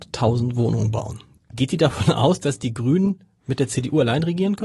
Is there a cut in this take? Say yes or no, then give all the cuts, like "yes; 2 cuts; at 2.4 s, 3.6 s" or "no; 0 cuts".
yes; 1 cut; at 1.4 s